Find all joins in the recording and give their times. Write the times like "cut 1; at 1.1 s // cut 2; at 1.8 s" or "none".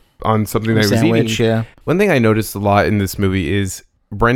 cut 1; at 1.8 s